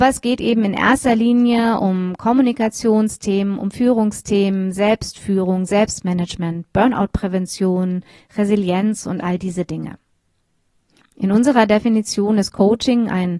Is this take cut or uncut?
cut